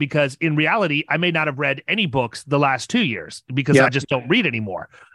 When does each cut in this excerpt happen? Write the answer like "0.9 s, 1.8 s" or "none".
none